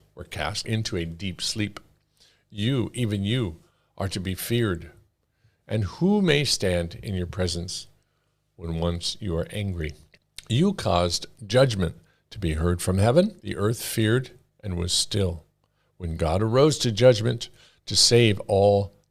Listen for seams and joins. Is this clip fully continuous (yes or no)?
yes